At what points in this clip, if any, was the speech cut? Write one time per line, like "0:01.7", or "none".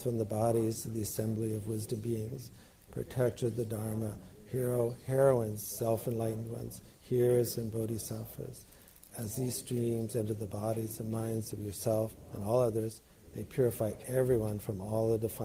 none